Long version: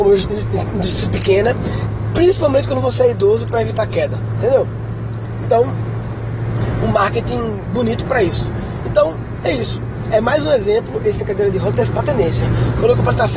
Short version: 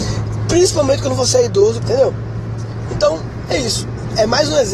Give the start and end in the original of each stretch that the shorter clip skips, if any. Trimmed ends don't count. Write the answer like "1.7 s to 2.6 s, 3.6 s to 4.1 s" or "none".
3.4 s to 4.3 s, 5.4 s to 8.8 s